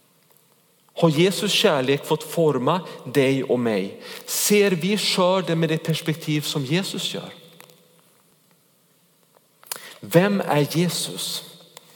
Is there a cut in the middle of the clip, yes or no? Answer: no